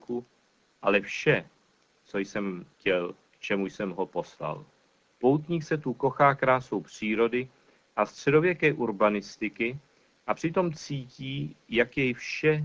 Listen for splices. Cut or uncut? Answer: cut